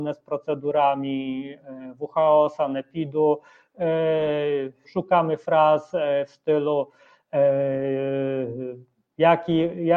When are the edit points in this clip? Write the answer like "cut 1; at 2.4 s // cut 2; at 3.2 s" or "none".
cut 1; at 4.8 s